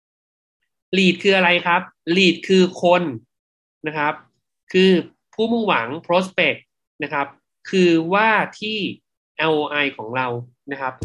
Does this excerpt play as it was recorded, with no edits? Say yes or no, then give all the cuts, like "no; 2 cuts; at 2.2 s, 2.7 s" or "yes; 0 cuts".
yes; 0 cuts